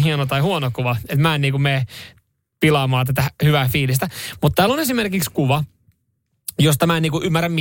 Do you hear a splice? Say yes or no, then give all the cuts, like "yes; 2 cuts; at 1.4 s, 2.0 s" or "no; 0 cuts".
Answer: no; 0 cuts